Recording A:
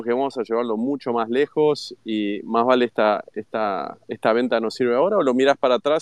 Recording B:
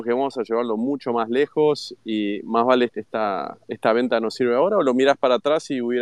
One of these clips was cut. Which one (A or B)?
B